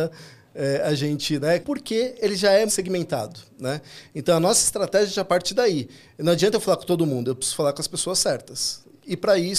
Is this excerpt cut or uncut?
cut